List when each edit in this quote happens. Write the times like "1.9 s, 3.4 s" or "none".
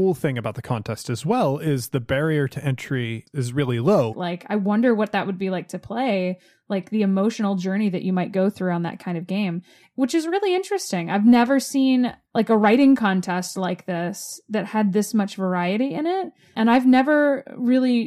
4.1 s